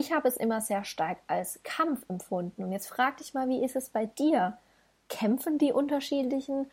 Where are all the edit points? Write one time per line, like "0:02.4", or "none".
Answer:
none